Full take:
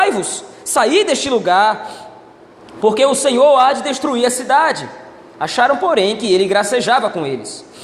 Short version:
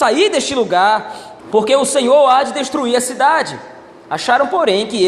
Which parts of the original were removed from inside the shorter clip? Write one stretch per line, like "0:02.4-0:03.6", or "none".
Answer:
0:02.1-0:02.7